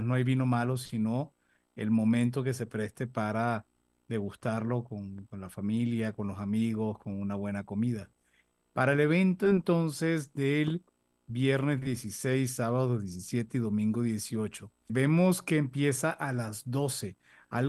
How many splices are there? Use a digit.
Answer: 1